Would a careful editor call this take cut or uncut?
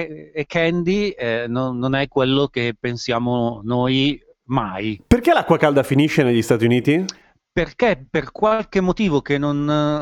uncut